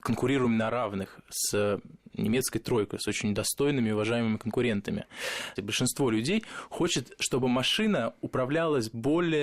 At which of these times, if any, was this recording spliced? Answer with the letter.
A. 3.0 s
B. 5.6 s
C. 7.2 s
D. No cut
B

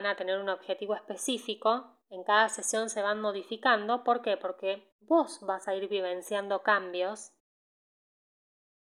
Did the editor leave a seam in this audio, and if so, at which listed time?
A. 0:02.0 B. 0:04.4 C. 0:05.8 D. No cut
D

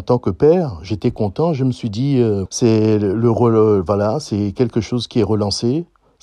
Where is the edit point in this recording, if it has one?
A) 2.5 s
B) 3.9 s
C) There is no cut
A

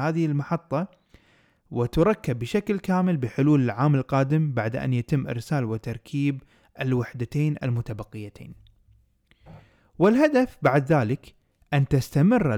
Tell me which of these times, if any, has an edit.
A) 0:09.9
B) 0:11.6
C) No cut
C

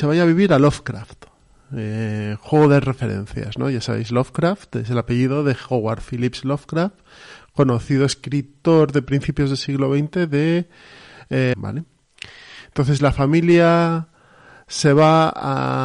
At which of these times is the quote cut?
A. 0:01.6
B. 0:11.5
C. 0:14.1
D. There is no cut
B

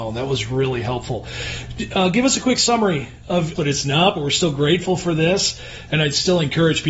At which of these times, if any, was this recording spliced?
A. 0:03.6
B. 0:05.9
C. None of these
A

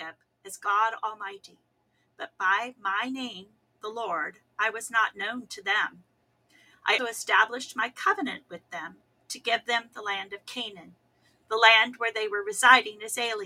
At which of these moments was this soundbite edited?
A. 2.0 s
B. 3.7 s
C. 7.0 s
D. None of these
C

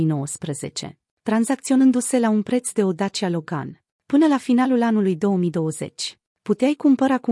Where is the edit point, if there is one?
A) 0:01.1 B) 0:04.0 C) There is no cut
A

